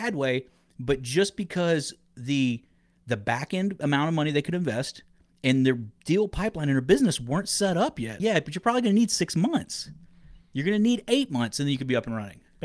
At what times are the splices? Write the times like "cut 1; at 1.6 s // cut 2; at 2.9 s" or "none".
cut 1; at 8.2 s